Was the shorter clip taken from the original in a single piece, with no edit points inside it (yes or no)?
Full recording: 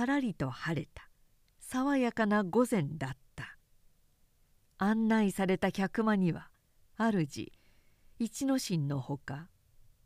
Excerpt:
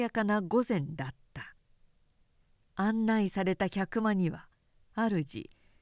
yes